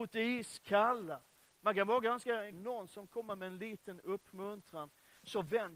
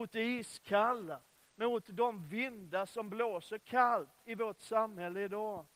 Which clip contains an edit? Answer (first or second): first